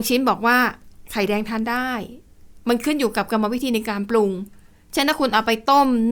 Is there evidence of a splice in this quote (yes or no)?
no